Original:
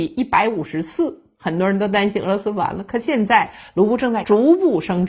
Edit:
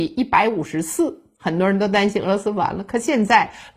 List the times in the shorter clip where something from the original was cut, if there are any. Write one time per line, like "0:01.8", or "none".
none